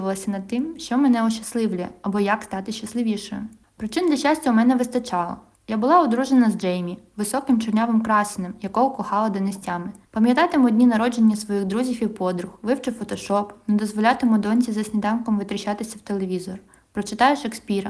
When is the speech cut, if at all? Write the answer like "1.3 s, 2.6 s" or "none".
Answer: 10.1 s